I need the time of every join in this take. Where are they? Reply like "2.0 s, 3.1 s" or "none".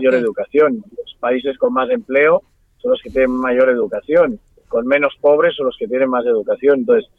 none